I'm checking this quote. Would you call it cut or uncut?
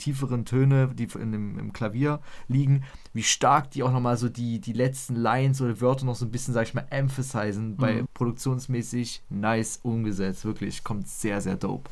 cut